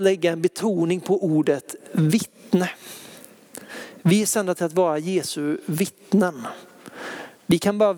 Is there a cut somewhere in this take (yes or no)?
no